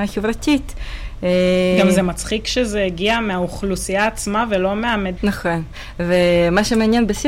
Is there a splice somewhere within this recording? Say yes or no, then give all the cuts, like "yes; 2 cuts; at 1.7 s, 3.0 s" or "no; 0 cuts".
yes; 1 cut; at 5.2 s